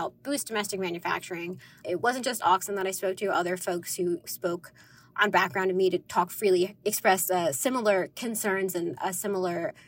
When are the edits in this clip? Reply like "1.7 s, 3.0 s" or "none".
none

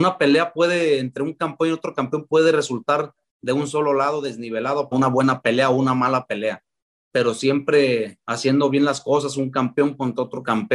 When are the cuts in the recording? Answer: 4.9 s

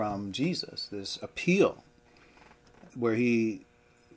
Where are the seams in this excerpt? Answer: 2.9 s

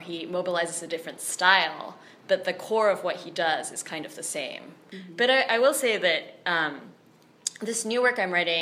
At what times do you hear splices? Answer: none

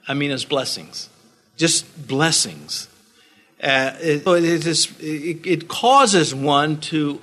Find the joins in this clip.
4.3 s

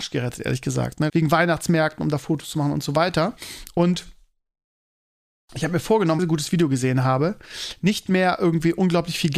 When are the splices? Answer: 1.1 s, 6.2 s

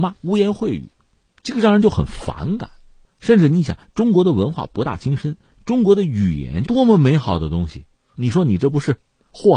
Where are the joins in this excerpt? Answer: 6.6 s, 8.1 s

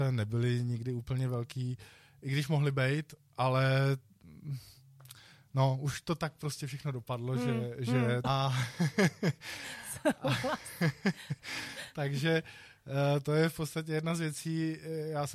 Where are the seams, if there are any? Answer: 8.2 s

